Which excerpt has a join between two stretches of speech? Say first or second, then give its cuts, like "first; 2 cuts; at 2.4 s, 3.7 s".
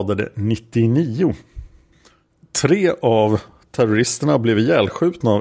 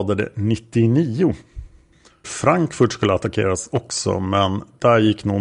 second; 1 cut; at 2.2 s